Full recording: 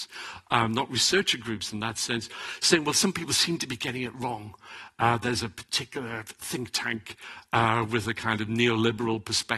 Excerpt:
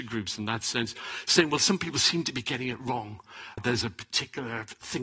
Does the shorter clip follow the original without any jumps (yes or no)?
no